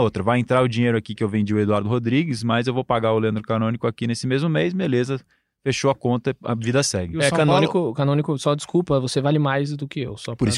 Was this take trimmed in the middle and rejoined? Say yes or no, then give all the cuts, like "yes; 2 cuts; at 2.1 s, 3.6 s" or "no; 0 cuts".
no; 0 cuts